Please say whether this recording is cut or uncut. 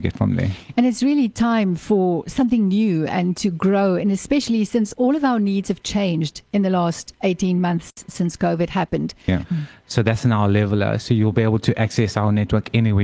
cut